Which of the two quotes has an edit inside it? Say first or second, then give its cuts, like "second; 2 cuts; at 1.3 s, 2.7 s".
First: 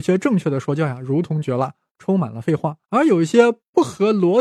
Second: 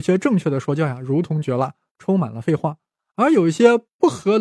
first; 1 cut; at 2.8 s